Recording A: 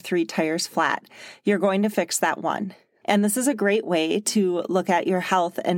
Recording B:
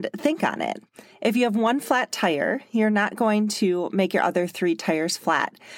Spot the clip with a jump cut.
A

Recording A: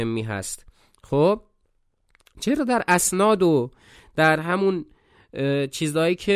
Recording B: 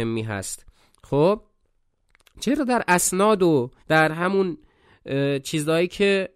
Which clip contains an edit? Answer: B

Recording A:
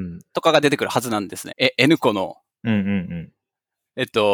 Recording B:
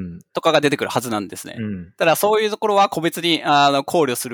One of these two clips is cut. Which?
A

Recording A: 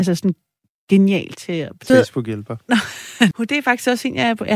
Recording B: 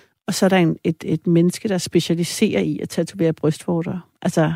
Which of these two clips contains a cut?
A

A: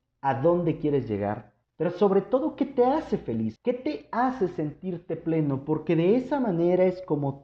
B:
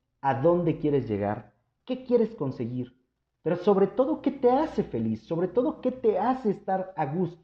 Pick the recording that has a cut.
A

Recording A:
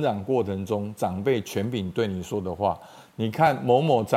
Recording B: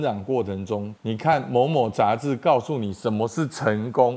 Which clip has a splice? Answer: B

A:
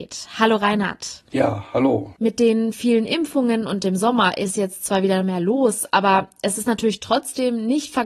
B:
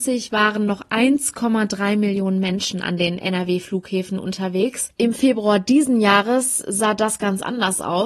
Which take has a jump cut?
A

